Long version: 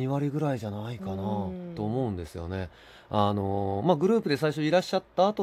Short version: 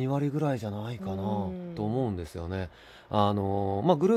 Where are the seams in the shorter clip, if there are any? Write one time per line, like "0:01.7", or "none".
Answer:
none